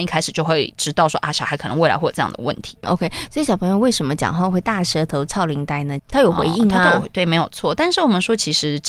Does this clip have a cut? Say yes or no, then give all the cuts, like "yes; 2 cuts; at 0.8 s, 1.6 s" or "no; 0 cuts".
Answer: yes; 2 cuts; at 2.8 s, 6.0 s